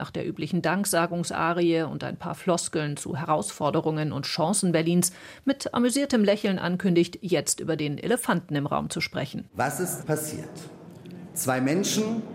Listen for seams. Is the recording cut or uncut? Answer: cut